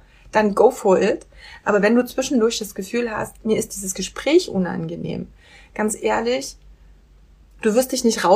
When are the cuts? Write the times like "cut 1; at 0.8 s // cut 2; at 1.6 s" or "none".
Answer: none

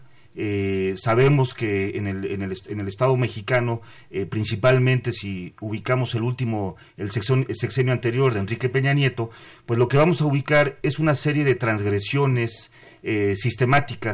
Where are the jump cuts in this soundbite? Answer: none

